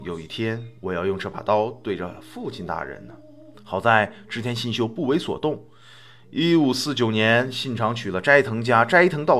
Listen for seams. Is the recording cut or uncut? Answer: cut